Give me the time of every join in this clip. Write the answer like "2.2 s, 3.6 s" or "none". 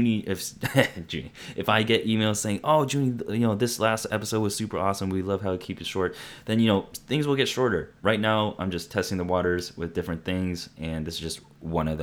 8.0 s

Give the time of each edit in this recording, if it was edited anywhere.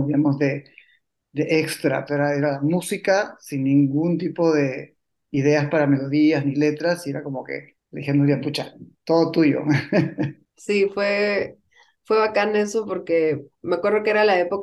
2.1 s

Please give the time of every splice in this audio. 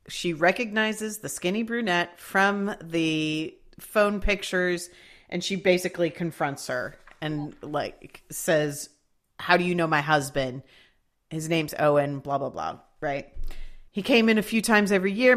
13.9 s

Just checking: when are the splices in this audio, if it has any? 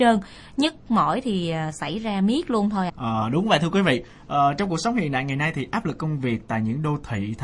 2.9 s

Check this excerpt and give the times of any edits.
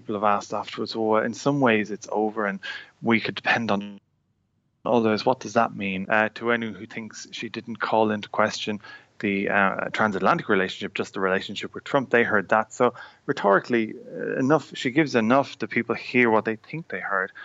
6.0 s

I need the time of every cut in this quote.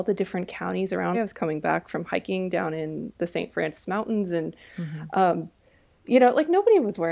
1.1 s

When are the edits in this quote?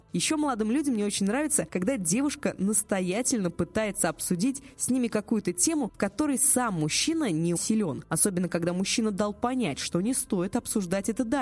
7.6 s

